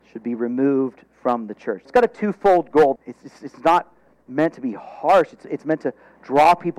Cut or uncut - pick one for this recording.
cut